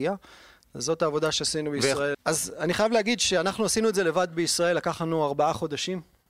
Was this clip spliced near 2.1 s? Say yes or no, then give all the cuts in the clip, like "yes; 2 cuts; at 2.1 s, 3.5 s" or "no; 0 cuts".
yes; 1 cut; at 2.1 s